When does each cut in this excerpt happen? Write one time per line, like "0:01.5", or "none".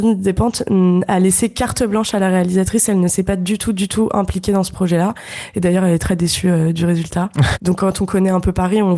0:07.5